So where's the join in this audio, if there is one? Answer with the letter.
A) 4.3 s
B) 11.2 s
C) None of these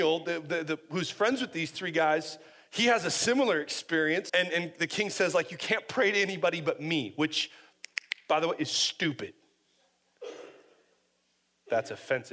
A